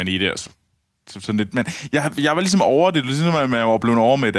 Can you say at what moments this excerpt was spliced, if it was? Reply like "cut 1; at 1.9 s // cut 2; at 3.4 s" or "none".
none

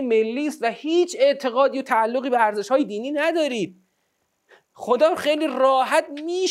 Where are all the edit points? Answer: none

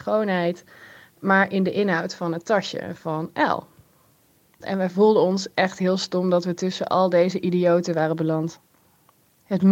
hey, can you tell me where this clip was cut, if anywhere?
cut 1; at 4.6 s

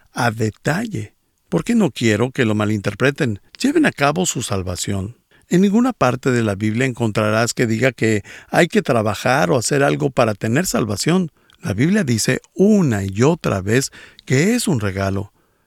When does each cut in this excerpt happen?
cut 1; at 3.5 s // cut 2; at 5.3 s // cut 3; at 11.4 s

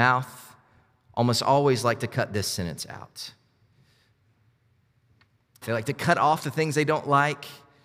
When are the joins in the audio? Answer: cut 1; at 5.6 s

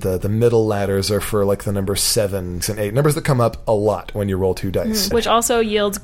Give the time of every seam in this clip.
cut 1; at 2.6 s // cut 2; at 5.1 s

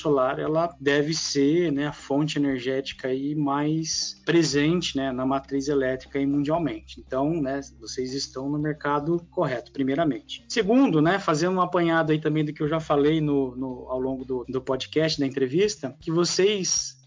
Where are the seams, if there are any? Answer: none

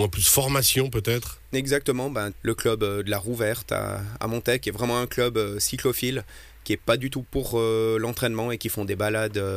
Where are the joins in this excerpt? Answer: cut 1; at 2.3 s

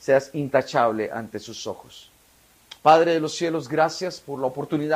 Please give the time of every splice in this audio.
none

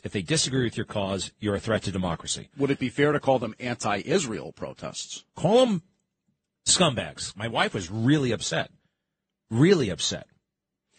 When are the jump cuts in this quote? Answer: cut 1; at 5.3 s // cut 2; at 7.3 s

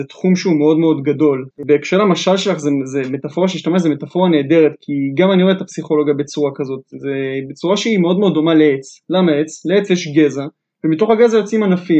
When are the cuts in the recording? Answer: cut 1; at 1.5 s

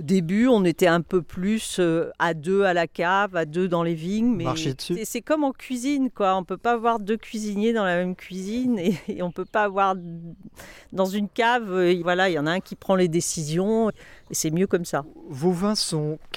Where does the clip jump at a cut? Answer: cut 1; at 12.0 s // cut 2; at 13.9 s

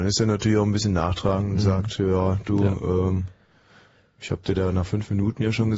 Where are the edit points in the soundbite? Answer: none

